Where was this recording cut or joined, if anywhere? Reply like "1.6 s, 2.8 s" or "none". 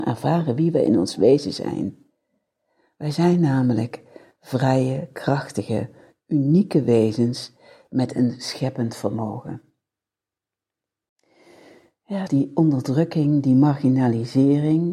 12.3 s